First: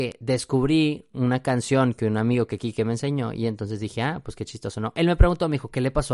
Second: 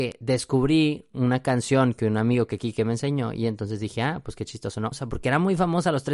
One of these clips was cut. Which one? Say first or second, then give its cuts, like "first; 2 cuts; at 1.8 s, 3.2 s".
second; 1 cut; at 4.9 s